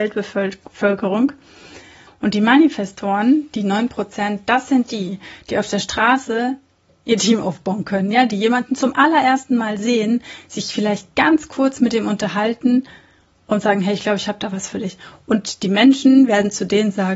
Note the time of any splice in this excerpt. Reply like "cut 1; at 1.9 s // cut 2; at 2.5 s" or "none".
cut 1; at 2.1 s